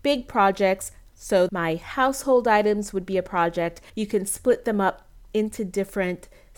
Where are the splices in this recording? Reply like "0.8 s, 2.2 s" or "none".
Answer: 1.5 s, 3.9 s

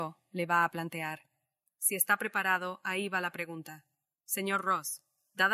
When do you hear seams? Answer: none

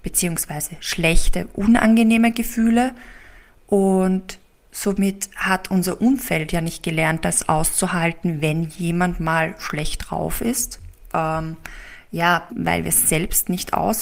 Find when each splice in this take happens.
11.1 s, 12.5 s

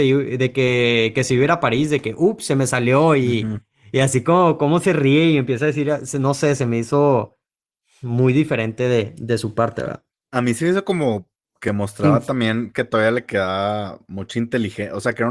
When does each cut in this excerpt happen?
none

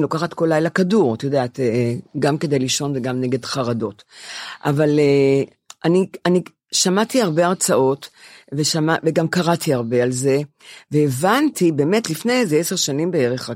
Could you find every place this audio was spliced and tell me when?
none

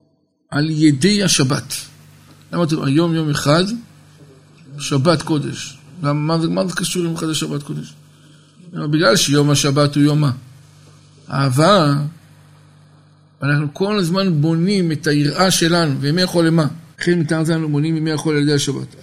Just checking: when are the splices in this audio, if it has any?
16.9 s

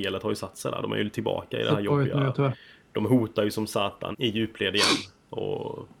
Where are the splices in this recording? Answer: 4.1 s

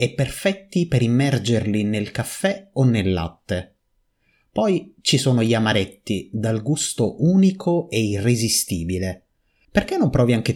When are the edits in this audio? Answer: 9.6 s

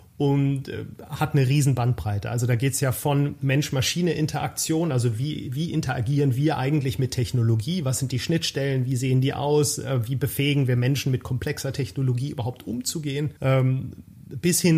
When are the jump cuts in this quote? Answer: 13.4 s

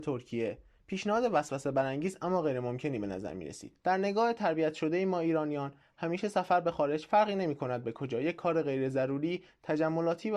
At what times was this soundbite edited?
3.8 s

